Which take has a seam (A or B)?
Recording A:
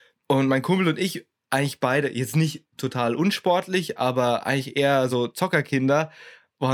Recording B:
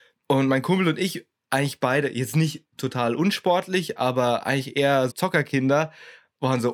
B